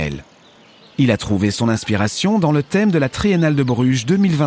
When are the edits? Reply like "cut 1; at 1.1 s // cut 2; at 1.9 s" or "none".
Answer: cut 1; at 0.9 s